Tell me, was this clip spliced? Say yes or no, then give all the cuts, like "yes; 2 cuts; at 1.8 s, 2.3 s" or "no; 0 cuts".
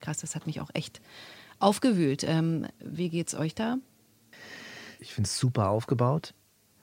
no; 0 cuts